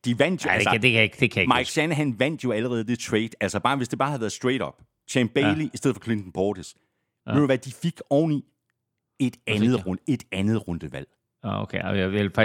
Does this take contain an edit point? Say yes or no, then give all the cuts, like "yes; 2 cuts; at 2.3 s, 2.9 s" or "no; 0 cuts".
no; 0 cuts